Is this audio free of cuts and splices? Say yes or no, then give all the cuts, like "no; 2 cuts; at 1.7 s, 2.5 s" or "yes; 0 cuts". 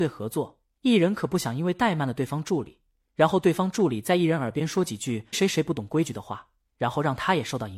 no; 1 cut; at 5.3 s